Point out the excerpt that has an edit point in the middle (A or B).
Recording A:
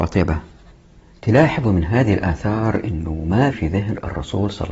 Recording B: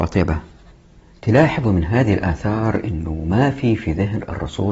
A